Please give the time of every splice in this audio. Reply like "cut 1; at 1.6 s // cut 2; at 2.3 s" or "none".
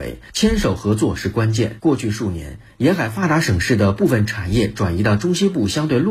none

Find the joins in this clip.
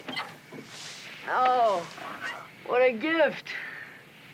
cut 1; at 2.5 s

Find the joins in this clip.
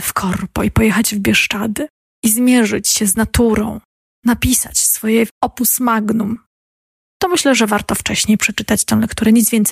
none

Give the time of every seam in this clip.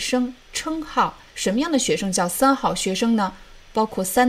cut 1; at 1.3 s

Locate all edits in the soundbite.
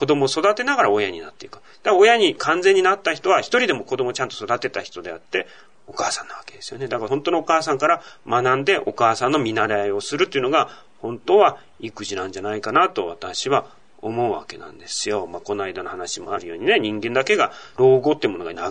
none

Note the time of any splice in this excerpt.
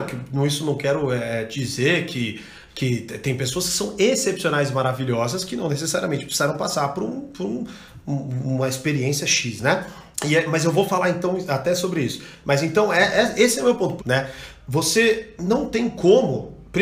cut 1; at 10.1 s // cut 2; at 14.0 s

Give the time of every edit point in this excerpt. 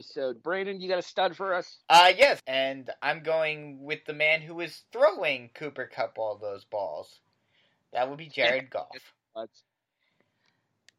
cut 1; at 2.4 s

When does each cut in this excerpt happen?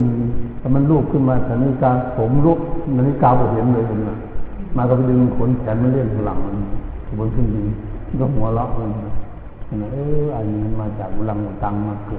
none

